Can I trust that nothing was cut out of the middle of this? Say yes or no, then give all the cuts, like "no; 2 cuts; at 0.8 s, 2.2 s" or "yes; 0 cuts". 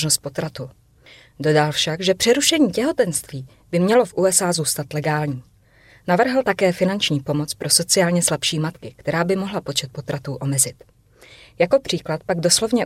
yes; 0 cuts